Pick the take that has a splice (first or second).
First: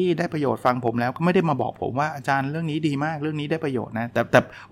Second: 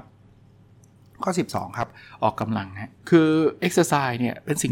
second